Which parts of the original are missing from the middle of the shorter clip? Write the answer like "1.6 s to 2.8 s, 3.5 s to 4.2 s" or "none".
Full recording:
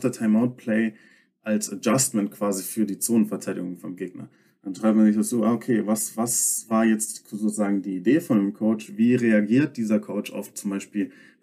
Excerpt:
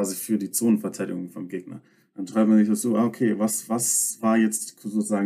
none